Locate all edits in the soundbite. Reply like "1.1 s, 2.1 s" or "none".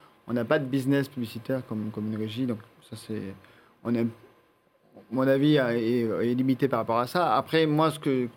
none